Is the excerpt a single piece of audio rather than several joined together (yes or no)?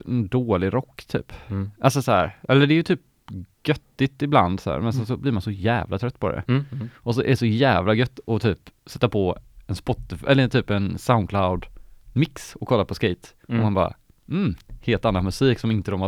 yes